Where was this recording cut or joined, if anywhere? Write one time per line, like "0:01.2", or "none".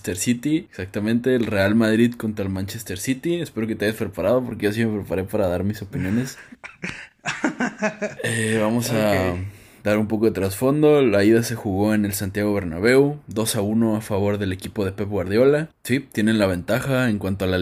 none